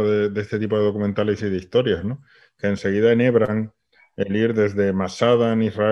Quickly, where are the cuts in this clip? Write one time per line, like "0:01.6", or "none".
none